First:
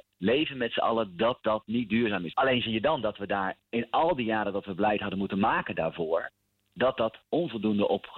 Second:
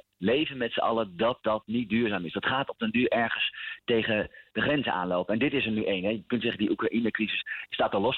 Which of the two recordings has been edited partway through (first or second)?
first